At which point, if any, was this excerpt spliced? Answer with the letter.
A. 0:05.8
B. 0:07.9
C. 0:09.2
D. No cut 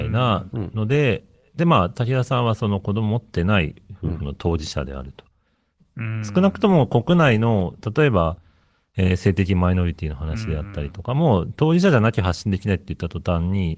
A